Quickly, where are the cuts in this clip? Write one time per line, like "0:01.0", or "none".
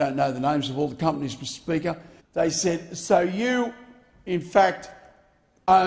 0:02.2